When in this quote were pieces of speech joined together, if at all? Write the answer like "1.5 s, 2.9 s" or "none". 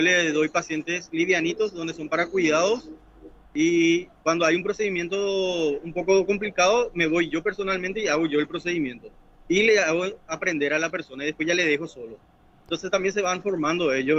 none